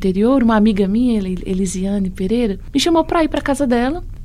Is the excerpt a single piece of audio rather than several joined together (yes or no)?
yes